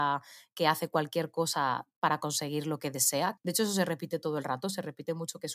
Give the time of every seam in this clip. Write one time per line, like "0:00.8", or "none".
0:03.4